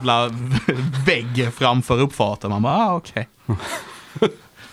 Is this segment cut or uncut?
uncut